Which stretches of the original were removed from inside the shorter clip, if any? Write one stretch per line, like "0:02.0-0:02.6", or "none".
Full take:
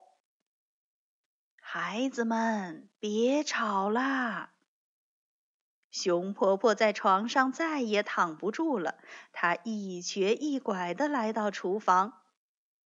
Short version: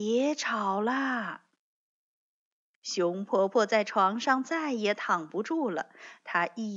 none